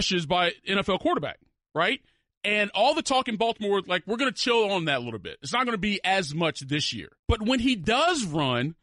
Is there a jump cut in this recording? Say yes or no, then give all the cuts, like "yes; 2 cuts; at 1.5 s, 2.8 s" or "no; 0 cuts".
no; 0 cuts